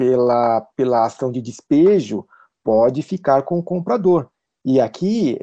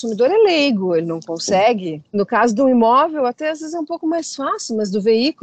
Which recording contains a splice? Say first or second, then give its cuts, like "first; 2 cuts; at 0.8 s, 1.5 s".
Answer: second; 1 cut; at 2.1 s